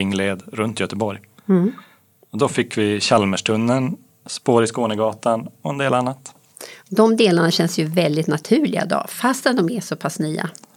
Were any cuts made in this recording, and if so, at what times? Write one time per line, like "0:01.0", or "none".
none